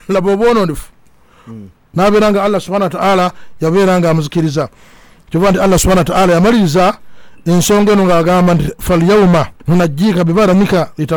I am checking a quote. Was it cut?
yes; 2 cuts; at 1.9 s, 9.6 s

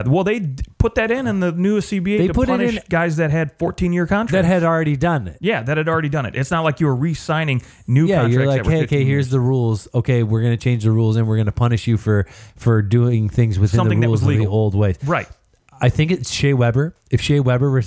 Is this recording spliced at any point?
no; 0 cuts

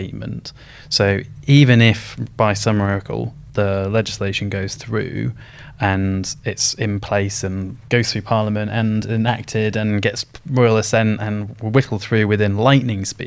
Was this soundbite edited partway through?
no; 0 cuts

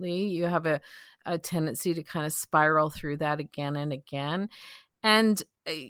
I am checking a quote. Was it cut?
no; 0 cuts

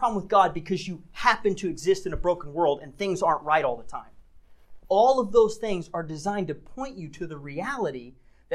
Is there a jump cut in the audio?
no; 0 cuts

